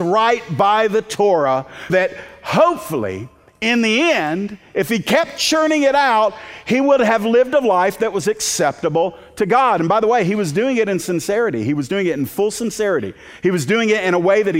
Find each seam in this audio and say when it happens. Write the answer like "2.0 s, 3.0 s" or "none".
1.9 s